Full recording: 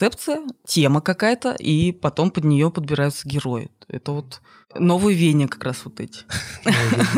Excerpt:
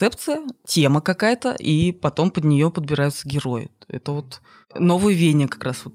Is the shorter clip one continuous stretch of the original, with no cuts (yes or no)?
yes